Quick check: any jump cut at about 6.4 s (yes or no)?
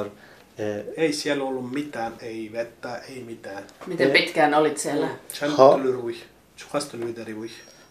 yes